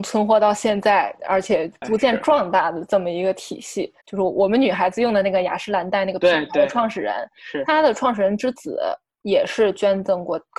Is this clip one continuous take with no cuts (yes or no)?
no